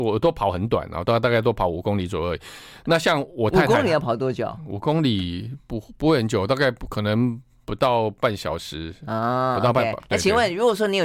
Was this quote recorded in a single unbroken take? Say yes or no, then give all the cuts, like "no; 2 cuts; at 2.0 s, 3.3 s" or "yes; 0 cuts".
yes; 0 cuts